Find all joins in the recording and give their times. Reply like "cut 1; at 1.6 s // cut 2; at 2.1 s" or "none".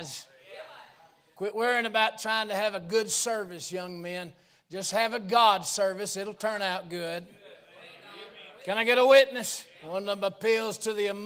cut 1; at 1.3 s // cut 2; at 9.8 s